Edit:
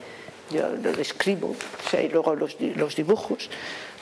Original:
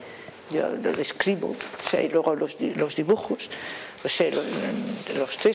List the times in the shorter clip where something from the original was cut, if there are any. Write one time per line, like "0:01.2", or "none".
none

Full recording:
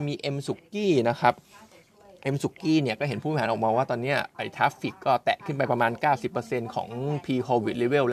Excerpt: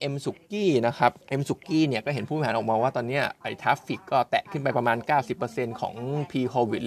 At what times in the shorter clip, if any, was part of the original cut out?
0:01.2

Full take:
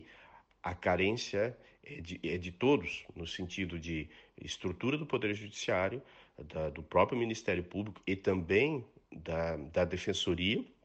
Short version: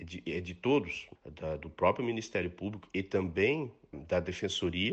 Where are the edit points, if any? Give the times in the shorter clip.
0:01.2
0:03.9

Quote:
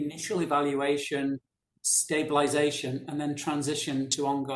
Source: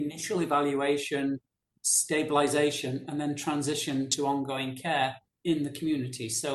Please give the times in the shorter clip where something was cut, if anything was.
none

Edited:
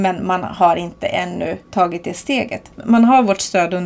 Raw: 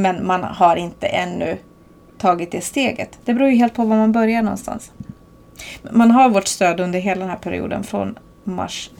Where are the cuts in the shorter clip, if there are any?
0:01.6
0:02.7

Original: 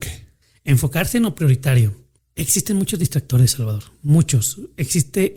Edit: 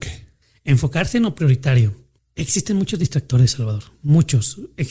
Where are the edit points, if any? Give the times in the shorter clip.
none

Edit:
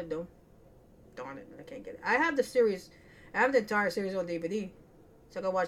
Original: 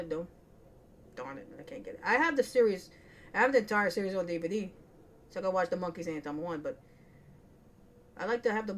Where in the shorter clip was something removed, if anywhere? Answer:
none

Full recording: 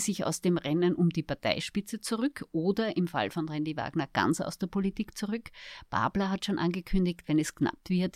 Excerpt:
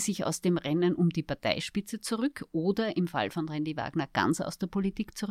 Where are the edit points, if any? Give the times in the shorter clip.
none

